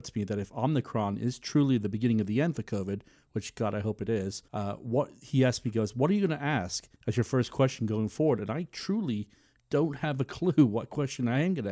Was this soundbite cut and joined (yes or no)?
yes